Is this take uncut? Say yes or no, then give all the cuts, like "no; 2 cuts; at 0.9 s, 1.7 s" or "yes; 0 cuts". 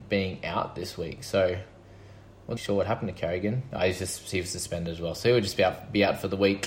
no; 1 cut; at 2.6 s